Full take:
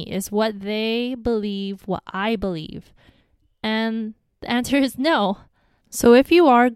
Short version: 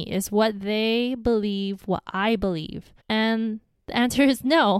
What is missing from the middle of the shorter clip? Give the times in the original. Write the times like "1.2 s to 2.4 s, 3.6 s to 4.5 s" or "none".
3.0 s to 3.5 s